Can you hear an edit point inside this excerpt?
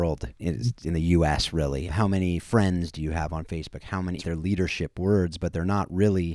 yes; 2 cuts; at 1.9 s, 4.2 s

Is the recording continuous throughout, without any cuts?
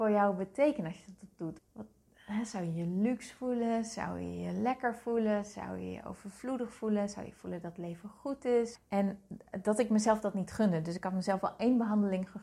no; 2 cuts; at 1.6 s, 8.8 s

